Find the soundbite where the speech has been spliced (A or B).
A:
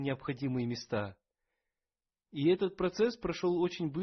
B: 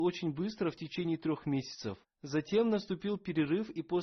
B